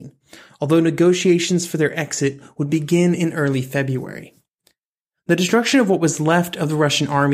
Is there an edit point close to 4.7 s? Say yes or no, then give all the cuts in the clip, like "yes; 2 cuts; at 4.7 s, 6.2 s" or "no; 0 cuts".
no; 0 cuts